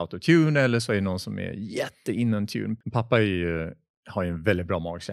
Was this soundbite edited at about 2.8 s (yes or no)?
yes